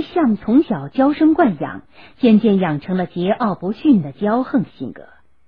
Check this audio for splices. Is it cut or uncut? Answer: uncut